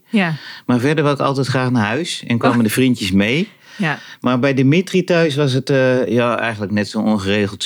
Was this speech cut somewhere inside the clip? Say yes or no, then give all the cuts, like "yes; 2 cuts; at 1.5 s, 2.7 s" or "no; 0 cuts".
no; 0 cuts